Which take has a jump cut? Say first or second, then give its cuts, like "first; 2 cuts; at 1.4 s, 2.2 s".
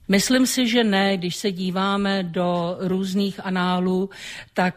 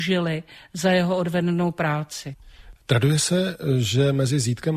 second; 1 cut; at 2.8 s